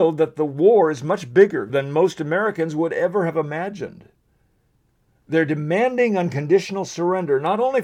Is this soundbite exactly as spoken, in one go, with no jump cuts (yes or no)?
no